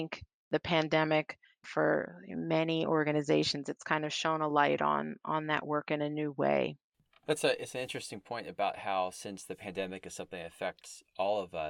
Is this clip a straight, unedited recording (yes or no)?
yes